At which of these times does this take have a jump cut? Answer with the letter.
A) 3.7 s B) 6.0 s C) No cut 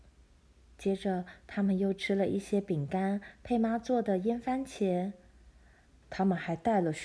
B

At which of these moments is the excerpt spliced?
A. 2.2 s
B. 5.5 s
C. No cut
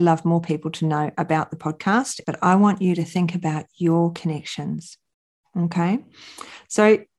A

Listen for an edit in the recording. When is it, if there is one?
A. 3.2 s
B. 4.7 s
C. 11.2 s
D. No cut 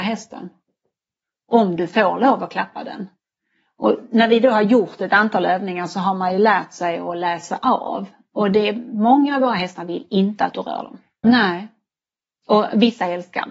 C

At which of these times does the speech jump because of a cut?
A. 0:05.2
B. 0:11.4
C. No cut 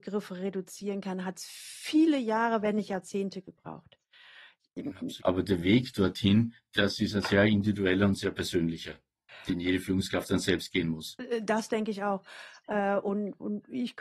A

